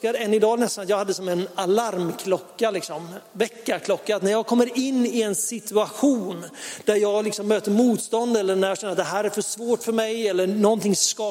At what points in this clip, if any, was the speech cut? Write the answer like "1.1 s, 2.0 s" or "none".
none